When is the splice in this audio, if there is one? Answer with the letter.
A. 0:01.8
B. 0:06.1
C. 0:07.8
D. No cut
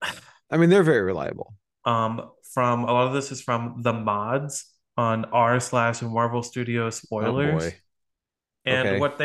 A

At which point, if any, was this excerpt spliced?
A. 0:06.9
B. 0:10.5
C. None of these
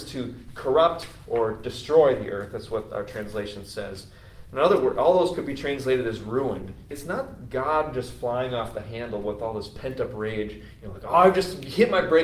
A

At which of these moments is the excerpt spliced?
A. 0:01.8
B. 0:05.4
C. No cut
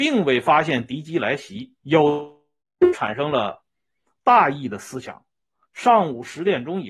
A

